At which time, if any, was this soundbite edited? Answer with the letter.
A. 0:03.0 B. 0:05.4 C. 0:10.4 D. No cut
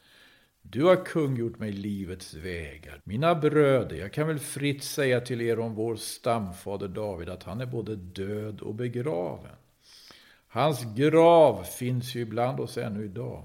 A